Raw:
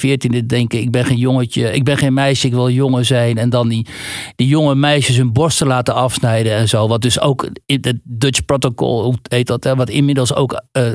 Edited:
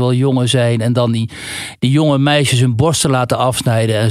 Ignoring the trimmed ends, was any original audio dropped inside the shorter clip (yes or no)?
no